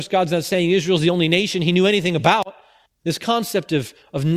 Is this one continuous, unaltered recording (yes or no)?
no